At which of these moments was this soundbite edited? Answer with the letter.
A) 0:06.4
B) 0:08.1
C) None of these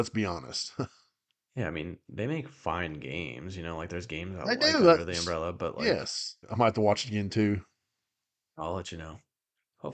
A